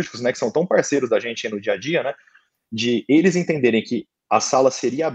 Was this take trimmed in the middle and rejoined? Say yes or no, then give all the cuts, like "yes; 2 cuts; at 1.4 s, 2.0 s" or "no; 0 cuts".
no; 0 cuts